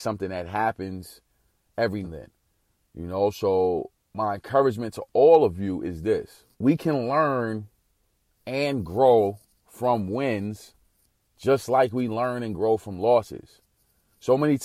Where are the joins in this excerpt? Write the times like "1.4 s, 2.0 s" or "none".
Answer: 2.0 s, 6.5 s